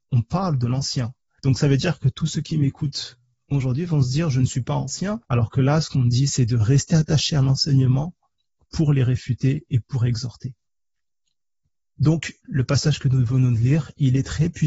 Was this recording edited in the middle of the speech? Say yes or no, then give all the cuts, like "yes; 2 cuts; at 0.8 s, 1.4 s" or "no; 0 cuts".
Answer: yes; 2 cuts; at 5.2 s, 12.4 s